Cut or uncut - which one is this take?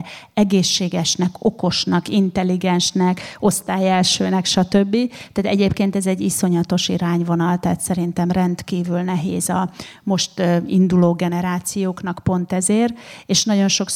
uncut